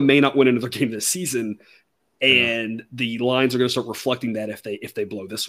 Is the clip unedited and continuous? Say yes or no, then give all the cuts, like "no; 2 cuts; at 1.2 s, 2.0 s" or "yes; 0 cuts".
yes; 0 cuts